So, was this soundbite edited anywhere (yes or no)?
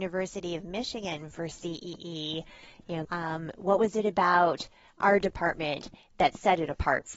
yes